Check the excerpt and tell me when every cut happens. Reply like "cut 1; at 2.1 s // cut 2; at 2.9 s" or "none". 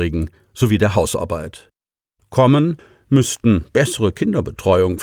none